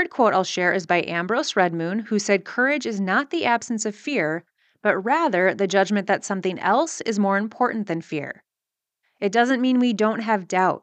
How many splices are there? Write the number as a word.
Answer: one